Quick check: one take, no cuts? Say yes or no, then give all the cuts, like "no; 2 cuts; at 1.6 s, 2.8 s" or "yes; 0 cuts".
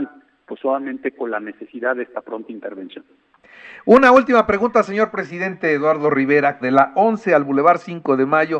no; 1 cut; at 6.6 s